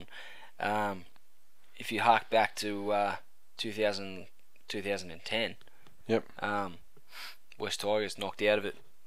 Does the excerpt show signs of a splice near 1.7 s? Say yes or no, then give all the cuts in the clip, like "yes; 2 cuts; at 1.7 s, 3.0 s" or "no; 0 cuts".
no; 1 cut; at 6.0 s